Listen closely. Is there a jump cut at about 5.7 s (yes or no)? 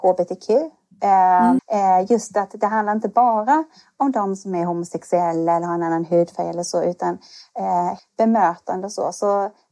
no